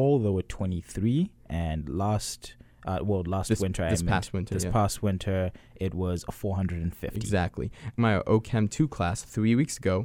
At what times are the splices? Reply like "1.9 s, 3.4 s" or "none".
8.0 s

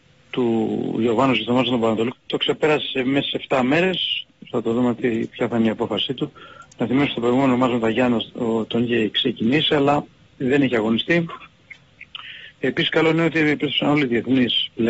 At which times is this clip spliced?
2.1 s, 4.5 s, 12.5 s

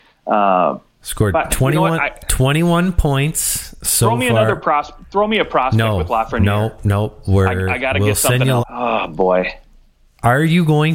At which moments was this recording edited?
1.5 s, 8.6 s

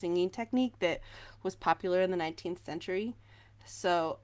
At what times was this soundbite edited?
none

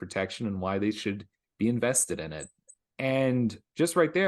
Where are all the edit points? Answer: 2.9 s

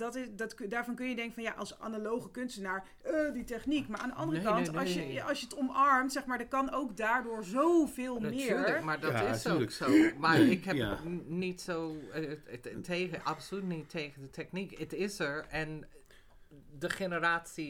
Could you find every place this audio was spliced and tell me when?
none

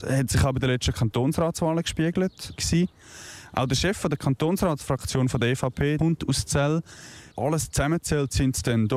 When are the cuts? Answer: 2.6 s, 6.0 s, 7.3 s

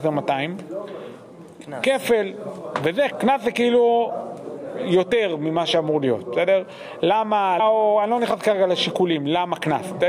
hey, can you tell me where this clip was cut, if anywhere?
3.1 s, 7.6 s

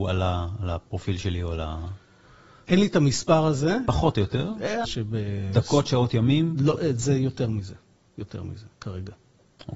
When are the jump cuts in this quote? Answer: 4.8 s

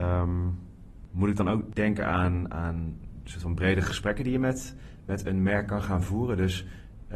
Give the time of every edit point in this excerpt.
none

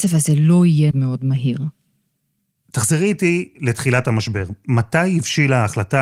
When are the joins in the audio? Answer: 0.9 s

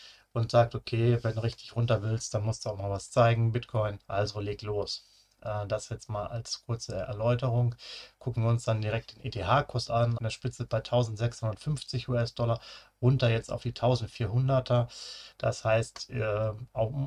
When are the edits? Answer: 4.0 s, 10.2 s, 15.3 s

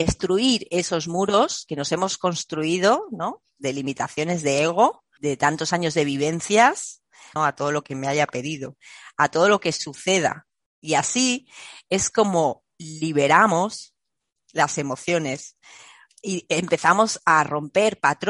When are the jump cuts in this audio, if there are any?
5.2 s, 7.4 s

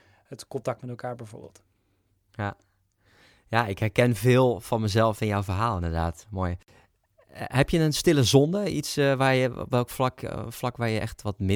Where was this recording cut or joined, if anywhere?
none

